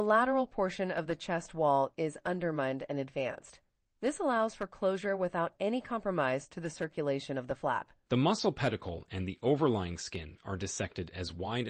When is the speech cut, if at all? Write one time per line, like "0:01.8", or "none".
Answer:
0:08.1